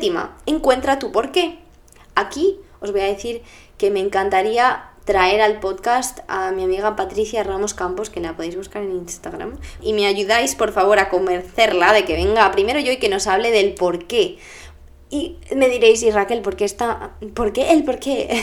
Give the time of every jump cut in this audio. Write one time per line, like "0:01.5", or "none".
0:09.8